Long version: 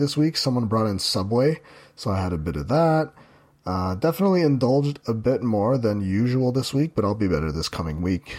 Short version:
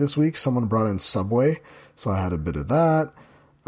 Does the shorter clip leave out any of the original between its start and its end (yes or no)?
no